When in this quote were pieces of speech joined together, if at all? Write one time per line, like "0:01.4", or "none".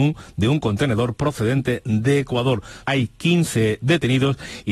0:02.8